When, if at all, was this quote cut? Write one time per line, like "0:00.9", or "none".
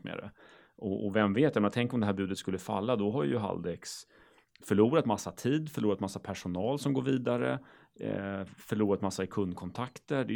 none